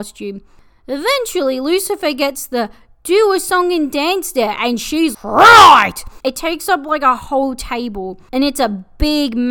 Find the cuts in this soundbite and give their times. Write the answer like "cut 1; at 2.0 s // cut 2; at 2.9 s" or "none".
cut 1; at 5.1 s // cut 2; at 6.2 s

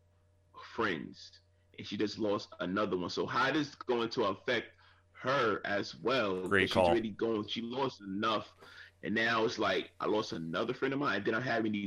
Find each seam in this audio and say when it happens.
none

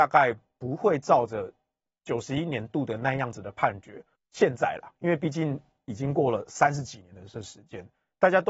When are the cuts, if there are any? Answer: cut 1; at 4.2 s

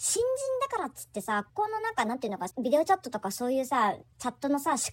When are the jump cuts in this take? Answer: cut 1; at 1.5 s // cut 2; at 2.5 s // cut 3; at 4.0 s

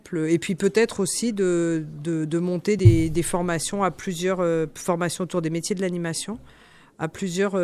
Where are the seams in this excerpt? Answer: none

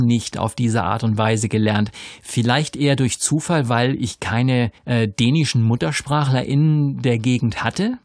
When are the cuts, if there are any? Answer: cut 1; at 4.8 s

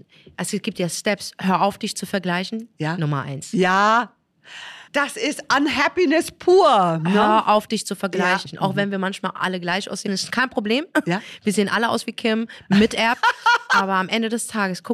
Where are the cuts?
cut 1; at 4.9 s // cut 2; at 10.1 s

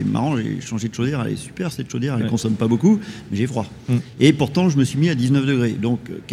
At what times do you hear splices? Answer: none

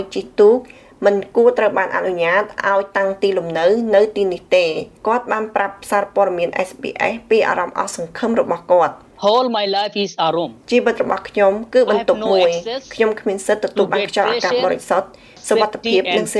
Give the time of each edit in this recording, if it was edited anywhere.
none

